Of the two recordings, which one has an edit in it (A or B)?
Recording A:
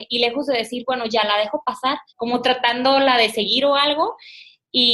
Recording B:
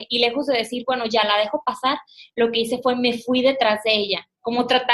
A